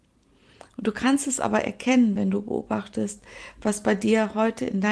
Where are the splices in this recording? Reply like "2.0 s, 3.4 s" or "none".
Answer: none